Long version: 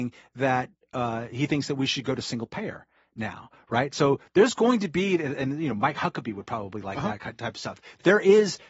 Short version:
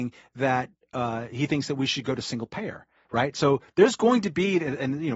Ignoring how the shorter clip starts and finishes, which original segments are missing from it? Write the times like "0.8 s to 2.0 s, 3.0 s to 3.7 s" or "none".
3.0 s to 3.6 s